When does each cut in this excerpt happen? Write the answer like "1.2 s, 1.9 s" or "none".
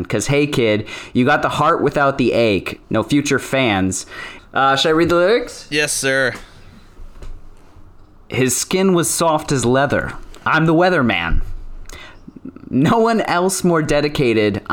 2.8 s, 4.4 s